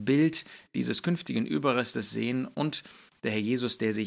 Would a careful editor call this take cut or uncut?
uncut